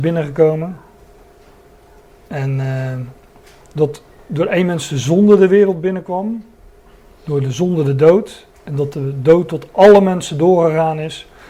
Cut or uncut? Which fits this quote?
uncut